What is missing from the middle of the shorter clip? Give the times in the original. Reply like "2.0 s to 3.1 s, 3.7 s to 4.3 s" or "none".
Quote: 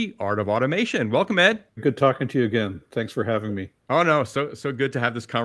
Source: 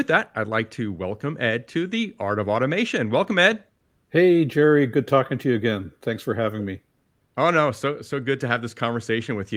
3.8 s to 4.9 s, 6.9 s to 7.3 s